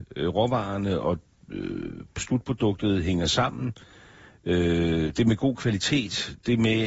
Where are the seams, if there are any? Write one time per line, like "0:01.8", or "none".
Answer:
none